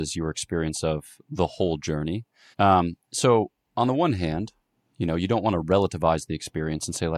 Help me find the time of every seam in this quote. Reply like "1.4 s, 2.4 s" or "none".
2.5 s